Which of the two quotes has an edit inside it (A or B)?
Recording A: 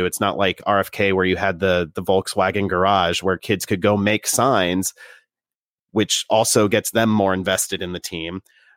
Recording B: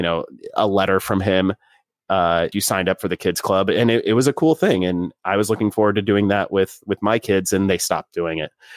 B